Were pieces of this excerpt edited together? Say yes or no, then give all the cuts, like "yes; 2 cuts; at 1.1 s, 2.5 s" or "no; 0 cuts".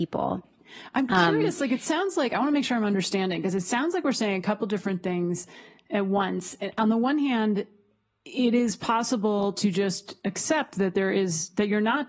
no; 0 cuts